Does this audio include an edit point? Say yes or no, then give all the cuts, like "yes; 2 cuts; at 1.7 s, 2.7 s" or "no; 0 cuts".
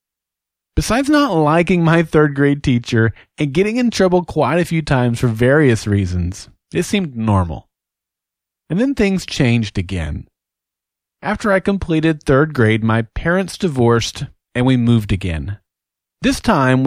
no; 0 cuts